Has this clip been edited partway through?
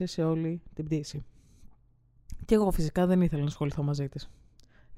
no; 0 cuts

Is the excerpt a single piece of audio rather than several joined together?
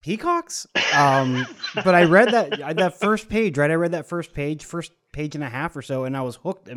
yes; 0 cuts

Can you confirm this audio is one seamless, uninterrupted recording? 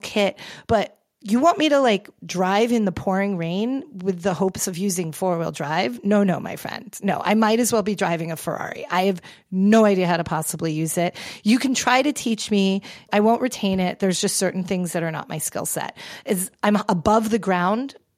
yes; 0 cuts

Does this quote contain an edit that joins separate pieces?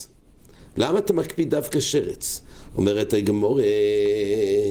no; 0 cuts

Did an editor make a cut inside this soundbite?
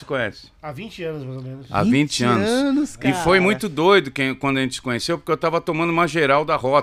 no; 0 cuts

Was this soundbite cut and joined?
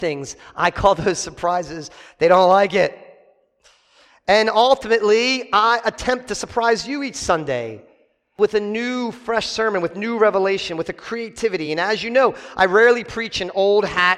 no; 0 cuts

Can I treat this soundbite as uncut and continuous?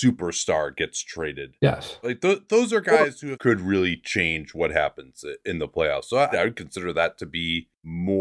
no; 3 cuts; at 2.0 s, 3.3 s, 6.3 s

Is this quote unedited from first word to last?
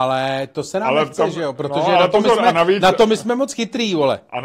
yes; 0 cuts

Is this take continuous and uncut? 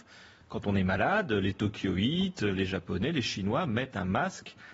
yes; 0 cuts

